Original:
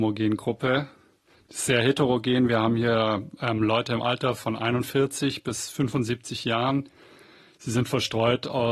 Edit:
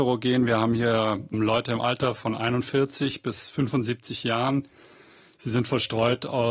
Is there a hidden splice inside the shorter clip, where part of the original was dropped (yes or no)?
yes